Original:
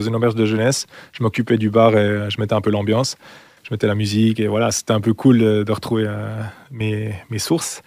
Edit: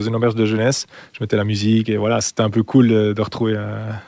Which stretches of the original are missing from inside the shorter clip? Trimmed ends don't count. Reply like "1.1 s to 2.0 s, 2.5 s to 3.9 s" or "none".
1.1 s to 3.6 s